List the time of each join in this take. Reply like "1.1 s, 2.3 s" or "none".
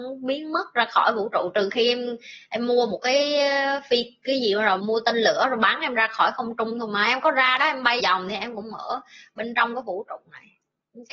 4.8 s, 8.0 s